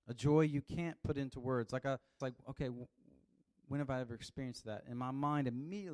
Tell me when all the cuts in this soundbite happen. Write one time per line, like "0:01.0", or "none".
0:02.2